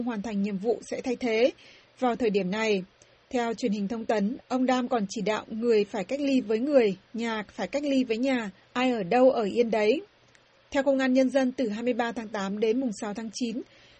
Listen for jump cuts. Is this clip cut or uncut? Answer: uncut